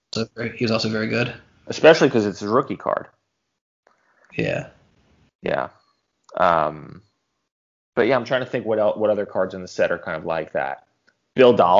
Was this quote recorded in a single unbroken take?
yes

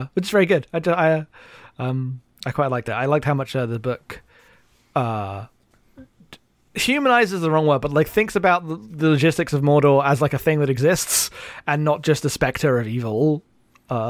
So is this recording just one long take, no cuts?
yes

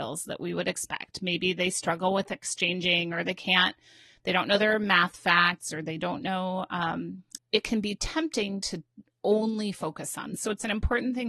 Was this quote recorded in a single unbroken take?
no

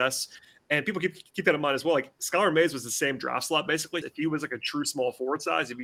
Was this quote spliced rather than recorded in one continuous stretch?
yes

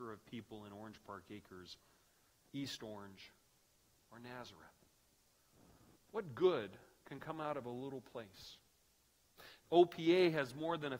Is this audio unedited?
no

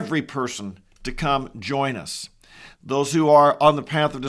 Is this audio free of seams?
no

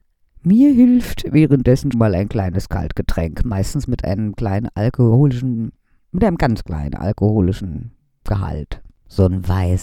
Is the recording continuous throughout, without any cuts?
no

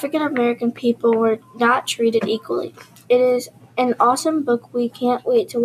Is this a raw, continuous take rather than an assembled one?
yes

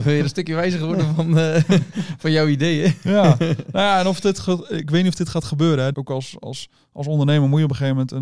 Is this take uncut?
no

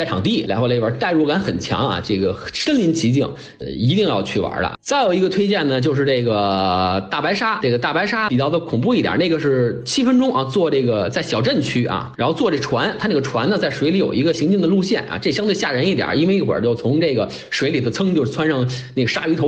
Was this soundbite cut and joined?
yes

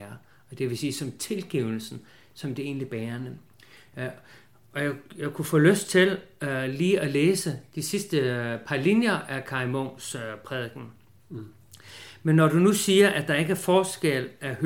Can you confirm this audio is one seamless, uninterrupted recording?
yes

